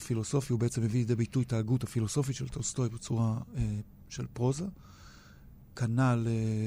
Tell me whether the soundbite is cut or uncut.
uncut